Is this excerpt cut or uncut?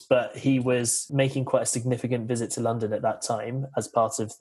uncut